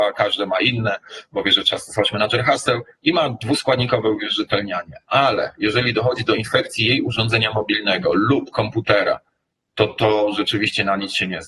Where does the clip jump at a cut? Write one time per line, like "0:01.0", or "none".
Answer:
none